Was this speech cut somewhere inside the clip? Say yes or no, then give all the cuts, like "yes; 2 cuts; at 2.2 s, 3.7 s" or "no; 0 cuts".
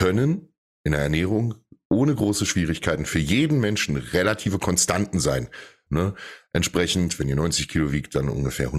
yes; 1 cut; at 5.9 s